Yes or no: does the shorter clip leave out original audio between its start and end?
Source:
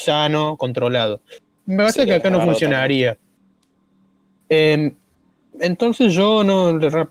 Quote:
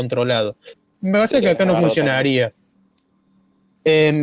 no